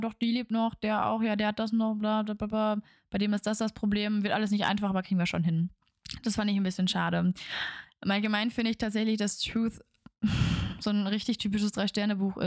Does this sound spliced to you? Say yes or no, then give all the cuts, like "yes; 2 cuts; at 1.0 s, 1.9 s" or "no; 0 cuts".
no; 0 cuts